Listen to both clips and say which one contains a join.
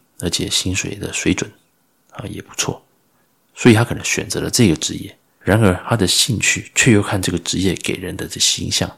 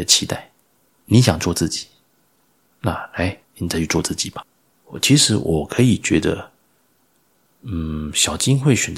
second; 1 cut; at 3.4 s

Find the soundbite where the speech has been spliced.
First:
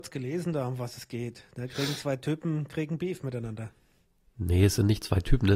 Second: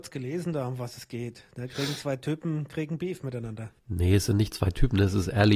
second; 1 cut; at 3.8 s

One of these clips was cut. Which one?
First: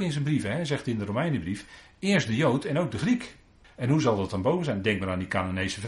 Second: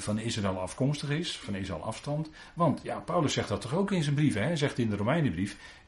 first; 1 cut; at 3.6 s

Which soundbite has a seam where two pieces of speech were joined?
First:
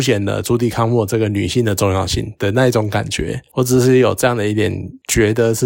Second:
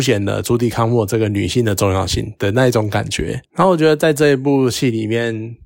second; 1 cut; at 3.4 s

